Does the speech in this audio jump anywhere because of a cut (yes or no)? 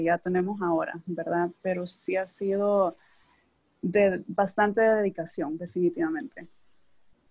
no